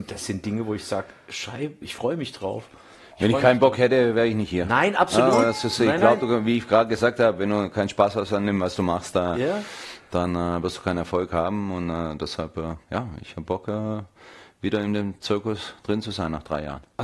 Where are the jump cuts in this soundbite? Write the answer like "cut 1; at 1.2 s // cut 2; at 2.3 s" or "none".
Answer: cut 1; at 1.8 s